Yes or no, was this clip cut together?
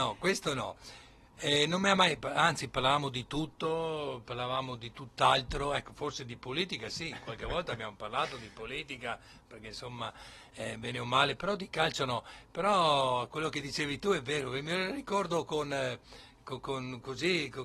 no